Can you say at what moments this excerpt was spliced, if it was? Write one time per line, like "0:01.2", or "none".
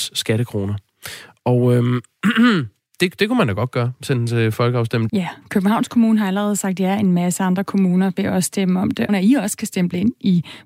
0:05.1
0:09.1